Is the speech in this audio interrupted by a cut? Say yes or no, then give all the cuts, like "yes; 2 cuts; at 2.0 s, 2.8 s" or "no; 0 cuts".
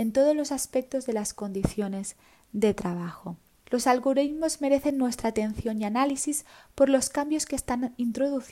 yes; 1 cut; at 3.6 s